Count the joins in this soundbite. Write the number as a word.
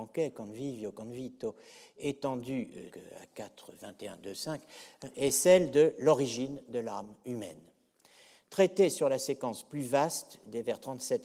one